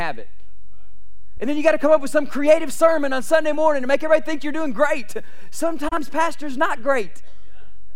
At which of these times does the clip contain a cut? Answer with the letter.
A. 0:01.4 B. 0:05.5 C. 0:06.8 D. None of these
A